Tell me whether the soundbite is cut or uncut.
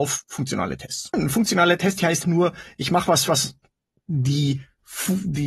cut